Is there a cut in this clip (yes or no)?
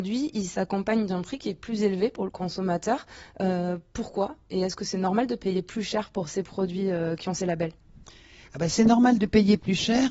no